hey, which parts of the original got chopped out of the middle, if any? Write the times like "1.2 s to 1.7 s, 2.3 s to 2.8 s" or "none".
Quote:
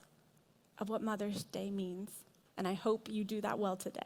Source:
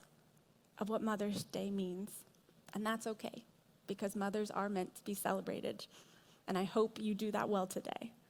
2.5 s to 6.4 s